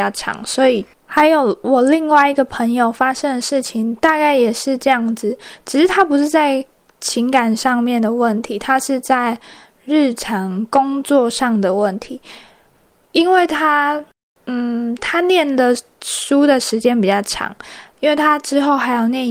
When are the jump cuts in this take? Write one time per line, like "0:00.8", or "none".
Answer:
0:00.9